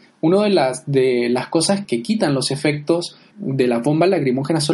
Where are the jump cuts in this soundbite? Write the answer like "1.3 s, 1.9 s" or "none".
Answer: 1.8 s, 3.3 s